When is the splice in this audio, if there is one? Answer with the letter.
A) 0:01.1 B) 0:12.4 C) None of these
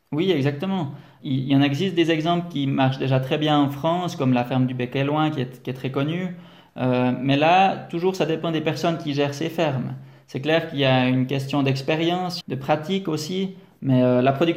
B